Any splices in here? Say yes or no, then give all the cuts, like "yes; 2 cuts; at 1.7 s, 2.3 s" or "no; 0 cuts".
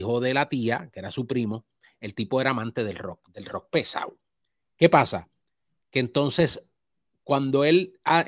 no; 0 cuts